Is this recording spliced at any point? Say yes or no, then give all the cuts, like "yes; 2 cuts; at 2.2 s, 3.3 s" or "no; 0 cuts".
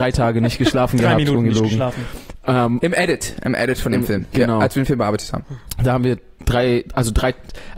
no; 0 cuts